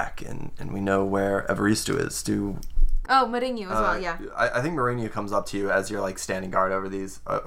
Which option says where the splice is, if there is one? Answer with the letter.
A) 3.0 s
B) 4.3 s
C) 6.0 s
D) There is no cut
A